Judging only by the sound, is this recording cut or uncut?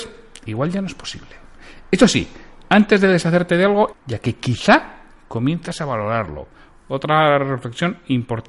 cut